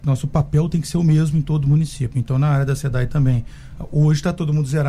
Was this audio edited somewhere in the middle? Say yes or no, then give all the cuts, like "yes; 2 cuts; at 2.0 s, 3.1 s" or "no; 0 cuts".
no; 0 cuts